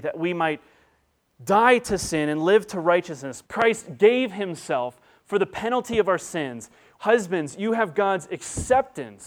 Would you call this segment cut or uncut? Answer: cut